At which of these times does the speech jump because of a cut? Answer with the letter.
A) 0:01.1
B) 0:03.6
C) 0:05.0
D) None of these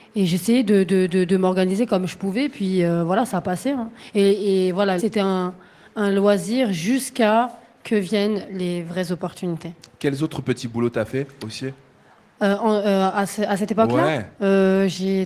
C